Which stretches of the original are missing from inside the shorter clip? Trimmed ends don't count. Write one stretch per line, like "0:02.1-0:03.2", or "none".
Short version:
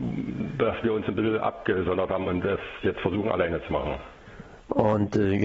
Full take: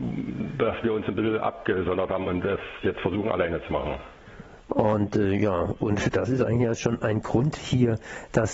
none